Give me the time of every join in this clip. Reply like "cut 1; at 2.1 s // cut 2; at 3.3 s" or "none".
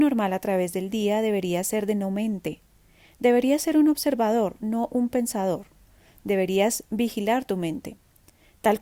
none

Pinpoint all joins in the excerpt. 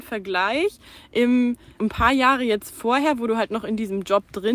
cut 1; at 1.8 s

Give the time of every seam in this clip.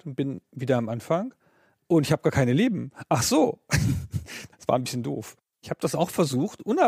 cut 1; at 5.5 s

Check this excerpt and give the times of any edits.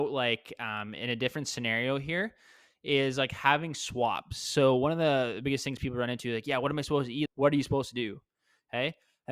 cut 1; at 7.3 s

